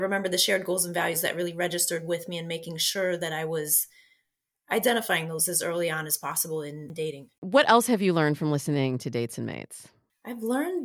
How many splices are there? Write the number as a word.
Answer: zero